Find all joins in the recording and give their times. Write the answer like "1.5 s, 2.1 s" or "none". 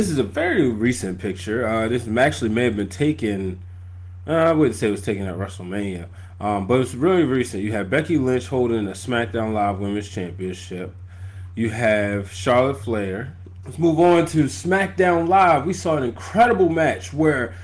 13.6 s